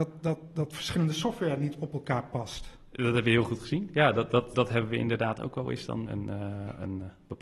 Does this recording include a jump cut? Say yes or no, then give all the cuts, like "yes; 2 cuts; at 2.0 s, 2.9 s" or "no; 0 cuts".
yes; 2 cuts; at 4.5 s, 6.1 s